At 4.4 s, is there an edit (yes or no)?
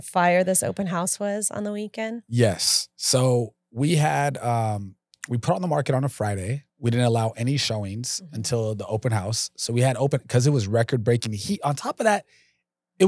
no